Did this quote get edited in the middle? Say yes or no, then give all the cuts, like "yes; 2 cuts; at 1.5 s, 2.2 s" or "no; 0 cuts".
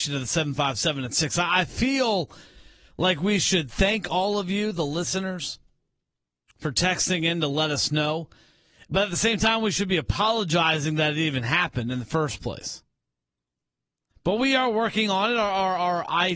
no; 0 cuts